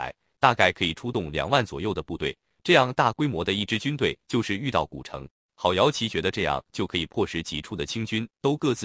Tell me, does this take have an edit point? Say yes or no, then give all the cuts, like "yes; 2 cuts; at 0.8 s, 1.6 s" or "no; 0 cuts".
yes; 1 cut; at 5.5 s